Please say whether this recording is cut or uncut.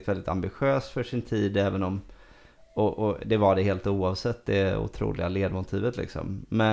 uncut